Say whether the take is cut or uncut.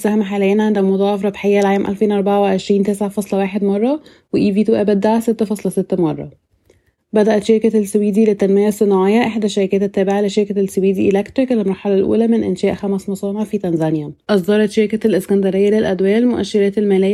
cut